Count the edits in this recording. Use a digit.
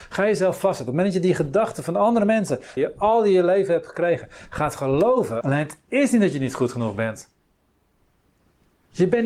2